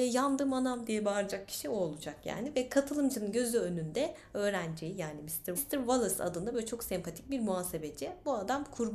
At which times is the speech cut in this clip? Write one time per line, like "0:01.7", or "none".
0:05.6

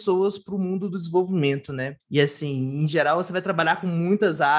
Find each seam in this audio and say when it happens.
0:02.0

